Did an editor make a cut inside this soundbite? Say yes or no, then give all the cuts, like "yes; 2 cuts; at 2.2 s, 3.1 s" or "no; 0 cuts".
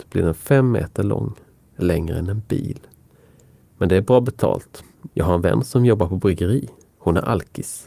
yes; 1 cut; at 5.1 s